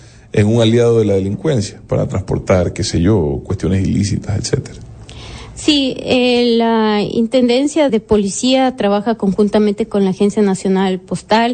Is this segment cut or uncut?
cut